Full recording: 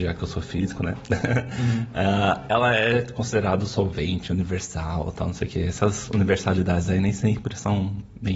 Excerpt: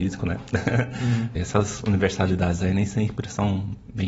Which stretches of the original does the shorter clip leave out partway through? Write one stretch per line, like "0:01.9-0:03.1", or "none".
0:01.9-0:05.6

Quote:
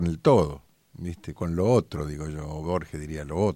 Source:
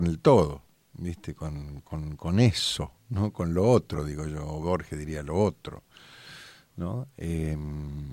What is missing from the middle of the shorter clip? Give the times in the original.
0:01.3-0:03.3

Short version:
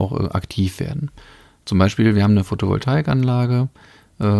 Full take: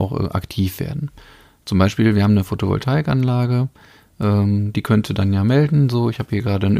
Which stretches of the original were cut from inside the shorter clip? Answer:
none

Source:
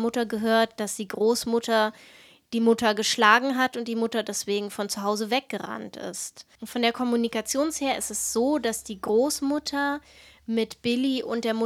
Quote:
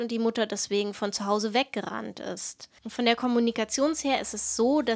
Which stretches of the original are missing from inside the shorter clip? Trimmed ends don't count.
none

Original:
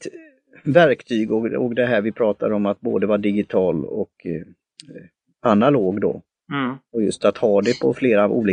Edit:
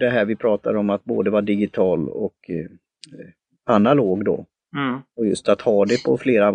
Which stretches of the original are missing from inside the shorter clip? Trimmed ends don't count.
none

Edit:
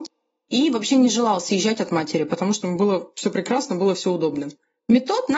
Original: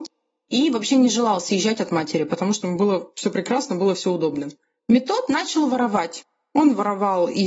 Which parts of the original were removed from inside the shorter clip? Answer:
none

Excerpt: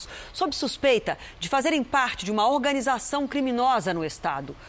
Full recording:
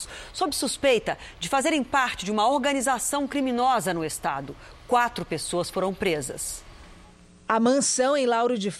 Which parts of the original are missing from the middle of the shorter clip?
none

